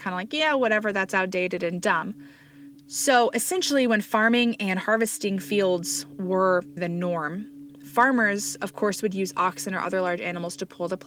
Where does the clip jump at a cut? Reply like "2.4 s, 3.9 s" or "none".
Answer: 2.8 s, 6.8 s